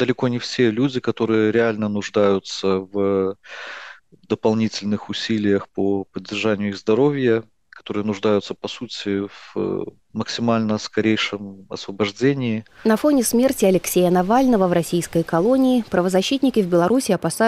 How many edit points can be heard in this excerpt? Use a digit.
0